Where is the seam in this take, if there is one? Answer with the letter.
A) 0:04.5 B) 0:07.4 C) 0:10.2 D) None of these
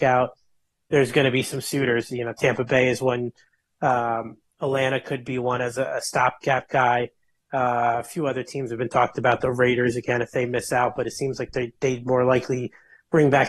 D